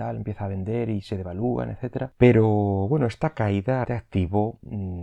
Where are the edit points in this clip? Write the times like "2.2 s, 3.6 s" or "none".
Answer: 2.1 s, 3.8 s